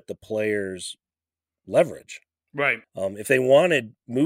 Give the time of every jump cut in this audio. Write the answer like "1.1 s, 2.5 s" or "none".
2.8 s